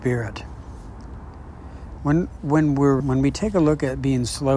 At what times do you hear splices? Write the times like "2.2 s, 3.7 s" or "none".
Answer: 2.0 s, 3.0 s